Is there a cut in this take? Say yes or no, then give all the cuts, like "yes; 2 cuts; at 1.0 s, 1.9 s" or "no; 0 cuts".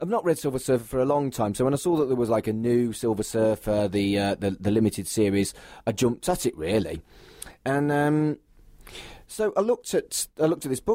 no; 0 cuts